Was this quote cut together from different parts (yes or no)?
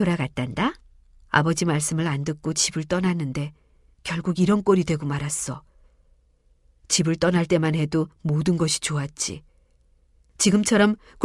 yes